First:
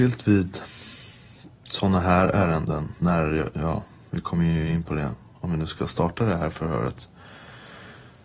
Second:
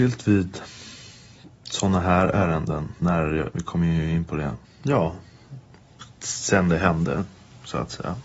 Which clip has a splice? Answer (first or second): second